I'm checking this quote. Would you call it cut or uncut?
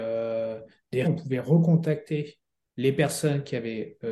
cut